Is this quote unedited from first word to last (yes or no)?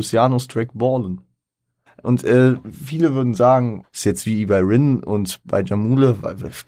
no